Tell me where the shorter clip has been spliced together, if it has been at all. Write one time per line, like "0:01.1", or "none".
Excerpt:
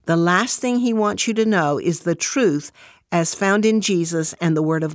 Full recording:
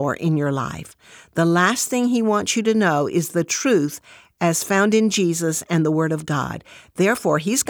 none